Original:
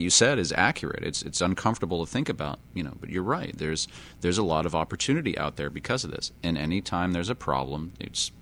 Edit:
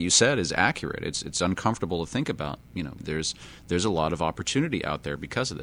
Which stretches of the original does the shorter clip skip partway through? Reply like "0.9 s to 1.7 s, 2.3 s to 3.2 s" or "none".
3.0 s to 3.5 s